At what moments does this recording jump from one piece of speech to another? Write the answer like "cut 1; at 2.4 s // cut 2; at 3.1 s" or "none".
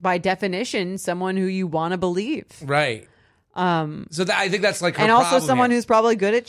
none